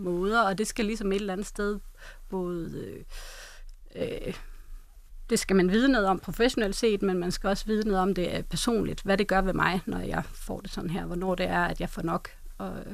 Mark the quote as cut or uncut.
uncut